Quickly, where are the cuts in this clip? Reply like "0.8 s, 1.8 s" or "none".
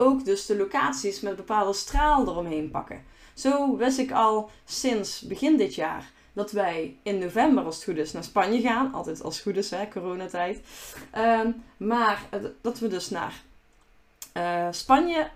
none